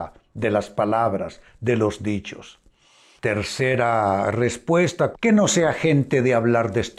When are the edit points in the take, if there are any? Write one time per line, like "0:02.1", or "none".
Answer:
0:03.2
0:05.1